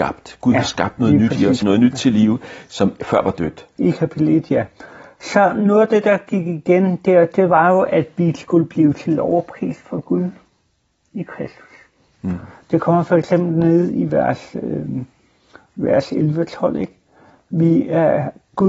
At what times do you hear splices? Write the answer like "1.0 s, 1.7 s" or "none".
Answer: 1.6 s, 3.8 s